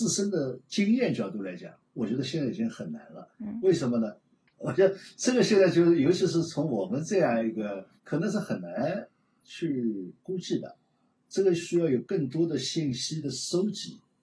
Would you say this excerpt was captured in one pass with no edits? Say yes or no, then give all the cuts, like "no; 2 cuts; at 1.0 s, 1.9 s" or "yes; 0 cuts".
no; 1 cut; at 4.5 s